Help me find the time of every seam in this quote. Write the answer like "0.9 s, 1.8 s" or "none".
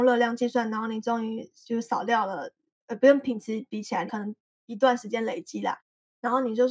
4.1 s